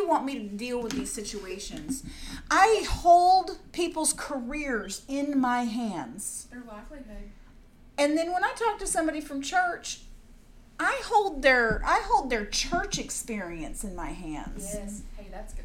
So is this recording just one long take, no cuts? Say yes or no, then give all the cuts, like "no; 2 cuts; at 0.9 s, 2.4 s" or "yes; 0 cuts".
yes; 0 cuts